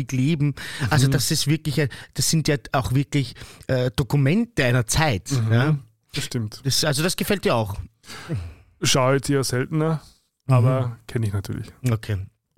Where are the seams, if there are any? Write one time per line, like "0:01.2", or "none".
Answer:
none